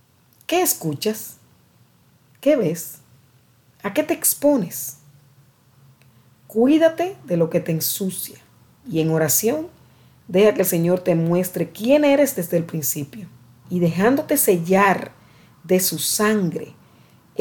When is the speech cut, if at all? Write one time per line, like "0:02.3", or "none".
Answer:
0:08.8
0:13.6